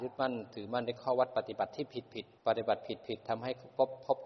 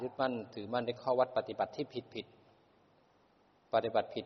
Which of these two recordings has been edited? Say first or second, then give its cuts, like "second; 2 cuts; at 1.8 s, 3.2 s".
first; 1 cut; at 2.4 s